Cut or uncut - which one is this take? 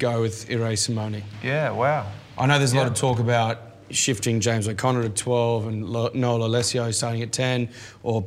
uncut